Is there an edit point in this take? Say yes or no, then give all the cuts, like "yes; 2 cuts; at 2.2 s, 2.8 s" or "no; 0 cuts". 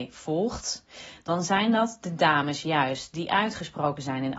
no; 0 cuts